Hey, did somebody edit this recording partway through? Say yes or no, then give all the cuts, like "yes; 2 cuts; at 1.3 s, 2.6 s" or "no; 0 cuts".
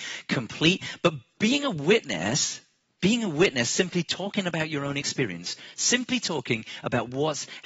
no; 0 cuts